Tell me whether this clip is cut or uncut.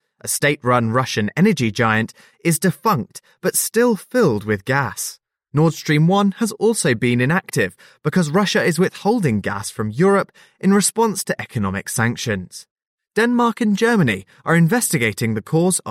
uncut